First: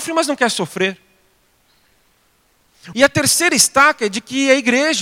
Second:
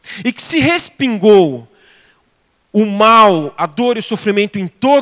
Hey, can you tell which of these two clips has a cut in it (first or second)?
first